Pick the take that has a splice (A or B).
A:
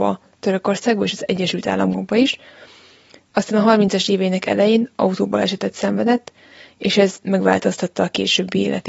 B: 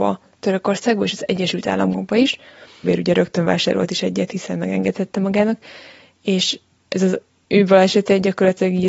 B